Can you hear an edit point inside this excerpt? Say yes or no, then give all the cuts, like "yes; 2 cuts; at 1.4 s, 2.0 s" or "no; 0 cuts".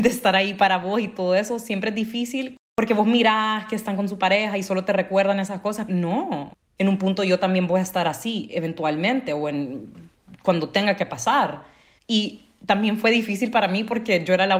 yes; 2 cuts; at 5.9 s, 12.0 s